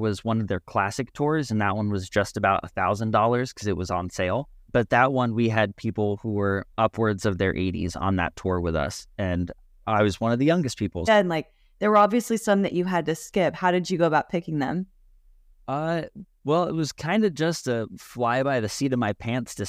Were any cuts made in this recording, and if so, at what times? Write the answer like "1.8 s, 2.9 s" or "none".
6.7 s, 11.1 s